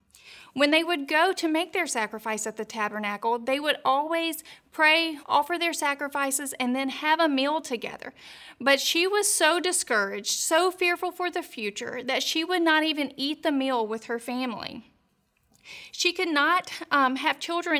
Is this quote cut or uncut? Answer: cut